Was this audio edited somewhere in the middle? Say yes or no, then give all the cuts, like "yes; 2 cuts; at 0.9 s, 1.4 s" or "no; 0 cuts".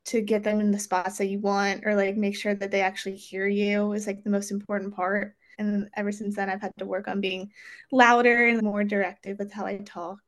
yes; 2 cuts; at 5.5 s, 8.6 s